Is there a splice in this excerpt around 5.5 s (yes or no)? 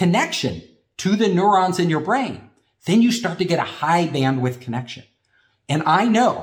no